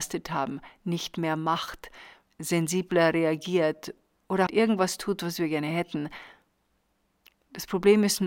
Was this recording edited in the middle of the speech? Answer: yes; 2 cuts; at 2.3 s, 4.5 s

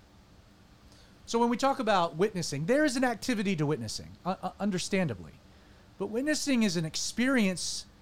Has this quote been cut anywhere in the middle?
no; 0 cuts

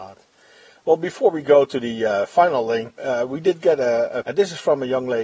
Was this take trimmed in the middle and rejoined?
yes; 2 cuts; at 3.0 s, 4.2 s

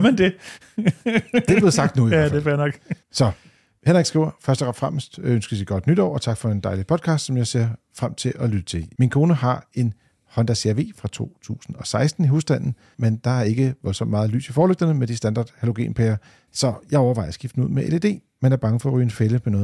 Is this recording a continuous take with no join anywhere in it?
no; 3 cuts; at 3.0 s, 9.0 s, 12.9 s

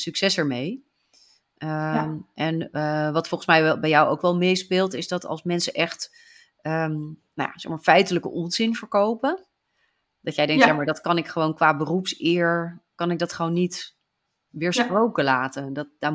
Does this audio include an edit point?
no; 0 cuts

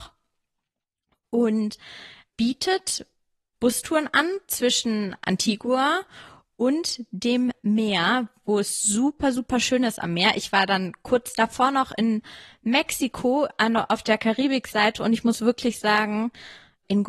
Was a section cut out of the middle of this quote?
no; 0 cuts

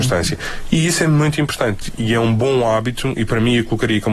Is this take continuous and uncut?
yes; 0 cuts

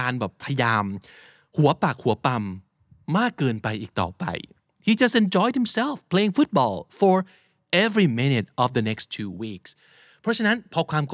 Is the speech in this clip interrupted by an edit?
no; 0 cuts

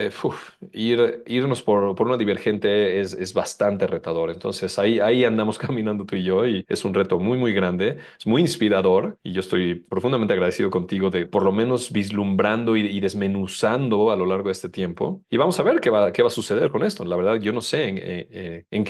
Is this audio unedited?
no; 1 cut; at 11.2 s

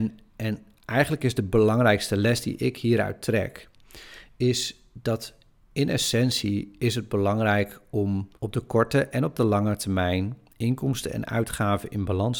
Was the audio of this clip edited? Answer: yes; 1 cut; at 8.4 s

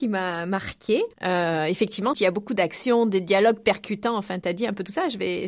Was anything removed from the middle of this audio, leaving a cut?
yes; 2 cuts; at 1.1 s, 2.1 s

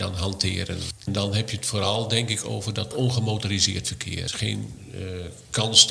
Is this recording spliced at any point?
no; 0 cuts

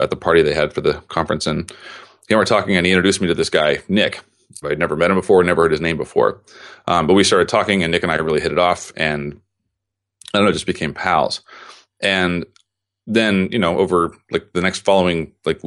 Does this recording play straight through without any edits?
no; 1 cut; at 4.6 s

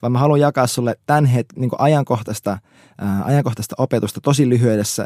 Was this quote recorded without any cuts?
yes; 0 cuts

